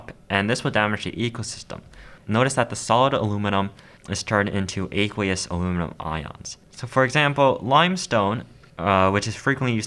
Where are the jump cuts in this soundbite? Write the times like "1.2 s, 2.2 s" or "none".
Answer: 2.2 s, 6.6 s